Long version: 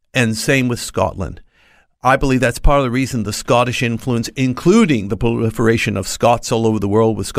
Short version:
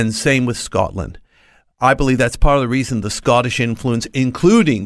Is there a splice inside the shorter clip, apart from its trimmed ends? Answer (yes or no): no